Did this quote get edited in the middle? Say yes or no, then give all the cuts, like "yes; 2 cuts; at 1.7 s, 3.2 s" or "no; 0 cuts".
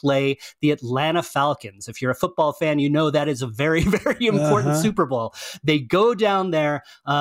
no; 0 cuts